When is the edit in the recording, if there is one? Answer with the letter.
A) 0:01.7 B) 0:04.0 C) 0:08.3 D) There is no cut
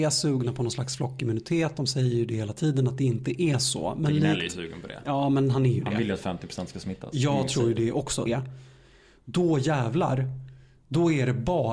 C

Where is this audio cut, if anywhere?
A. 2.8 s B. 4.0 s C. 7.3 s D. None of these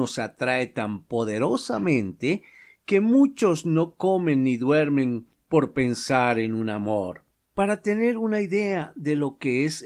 C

